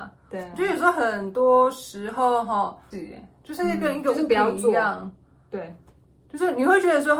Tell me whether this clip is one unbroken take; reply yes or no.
no